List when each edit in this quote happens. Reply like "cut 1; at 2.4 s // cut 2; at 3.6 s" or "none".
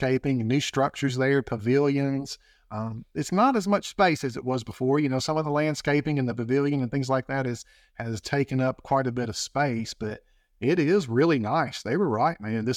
none

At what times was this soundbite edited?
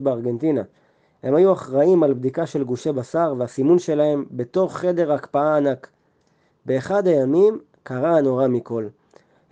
none

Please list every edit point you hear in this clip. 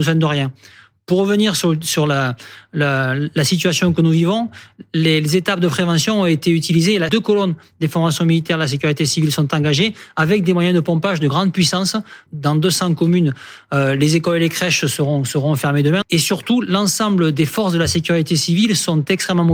cut 1; at 7.1 s // cut 2; at 12.3 s // cut 3; at 16.0 s

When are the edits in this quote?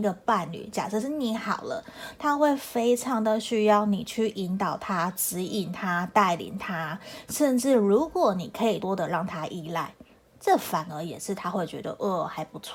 cut 1; at 8.8 s

